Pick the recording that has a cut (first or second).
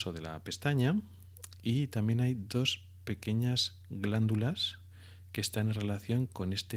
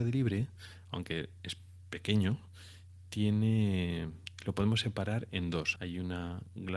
second